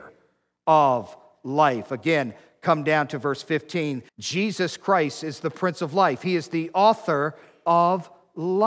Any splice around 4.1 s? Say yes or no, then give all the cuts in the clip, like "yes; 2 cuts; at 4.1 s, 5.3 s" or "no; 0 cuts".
yes; 1 cut; at 4.1 s